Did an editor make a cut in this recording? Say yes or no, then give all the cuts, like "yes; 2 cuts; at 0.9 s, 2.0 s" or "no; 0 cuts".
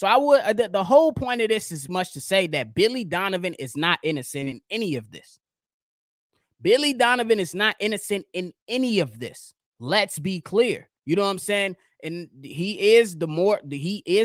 yes; 2 cuts; at 1.9 s, 11.0 s